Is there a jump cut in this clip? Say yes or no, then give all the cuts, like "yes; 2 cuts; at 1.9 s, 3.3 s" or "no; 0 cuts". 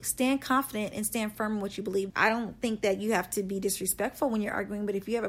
yes; 1 cut; at 2.1 s